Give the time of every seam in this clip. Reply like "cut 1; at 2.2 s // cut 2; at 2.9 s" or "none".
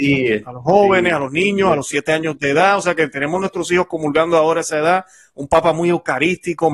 none